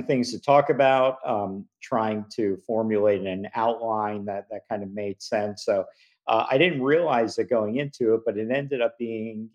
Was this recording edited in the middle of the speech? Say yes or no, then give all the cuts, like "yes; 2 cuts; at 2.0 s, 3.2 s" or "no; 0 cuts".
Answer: no; 0 cuts